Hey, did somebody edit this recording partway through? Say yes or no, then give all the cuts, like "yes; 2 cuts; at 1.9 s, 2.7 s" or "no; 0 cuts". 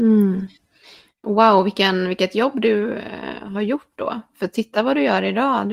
no; 0 cuts